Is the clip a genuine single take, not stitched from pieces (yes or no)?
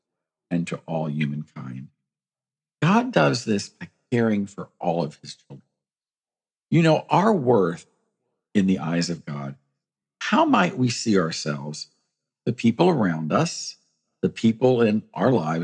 yes